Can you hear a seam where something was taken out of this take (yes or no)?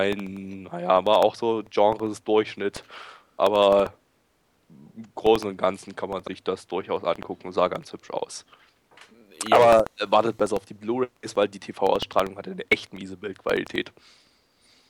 no